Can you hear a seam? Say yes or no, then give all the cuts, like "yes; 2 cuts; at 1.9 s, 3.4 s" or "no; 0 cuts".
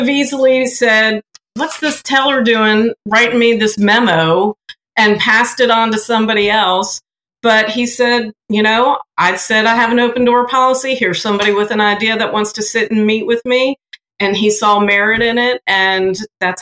no; 0 cuts